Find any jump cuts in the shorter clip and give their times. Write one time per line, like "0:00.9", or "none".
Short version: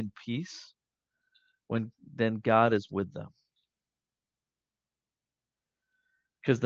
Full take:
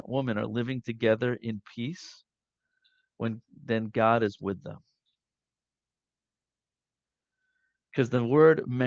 none